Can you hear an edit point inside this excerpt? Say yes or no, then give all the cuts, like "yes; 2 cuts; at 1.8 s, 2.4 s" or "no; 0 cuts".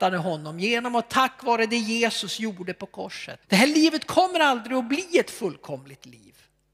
yes; 1 cut; at 3.4 s